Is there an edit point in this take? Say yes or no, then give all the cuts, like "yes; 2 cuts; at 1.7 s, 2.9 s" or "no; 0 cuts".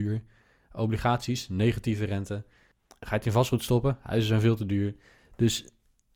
no; 0 cuts